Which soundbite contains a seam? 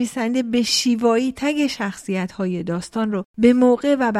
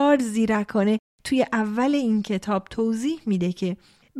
first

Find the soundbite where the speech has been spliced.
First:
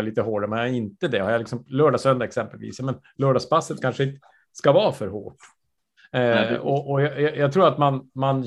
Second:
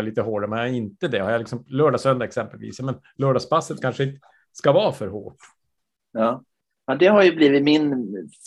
first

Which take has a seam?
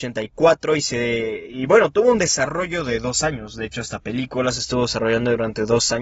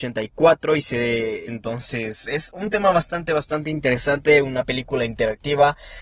second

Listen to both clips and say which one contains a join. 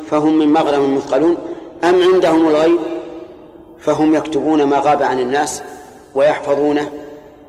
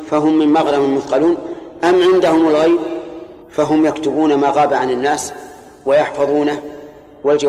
second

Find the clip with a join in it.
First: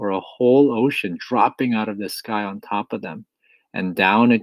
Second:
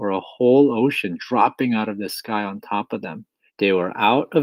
second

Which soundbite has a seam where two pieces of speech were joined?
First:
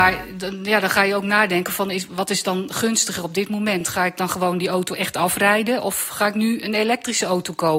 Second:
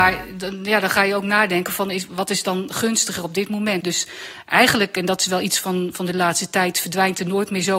second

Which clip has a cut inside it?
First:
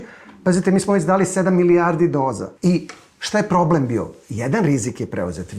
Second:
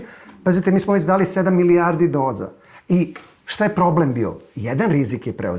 first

